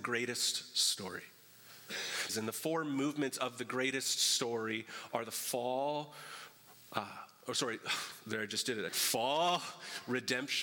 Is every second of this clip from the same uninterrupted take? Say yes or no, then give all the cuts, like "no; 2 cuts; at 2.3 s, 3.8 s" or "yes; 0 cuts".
no; 2 cuts; at 2.3 s, 8.9 s